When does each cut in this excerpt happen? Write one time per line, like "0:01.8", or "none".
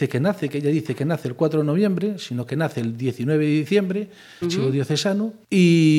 0:04.4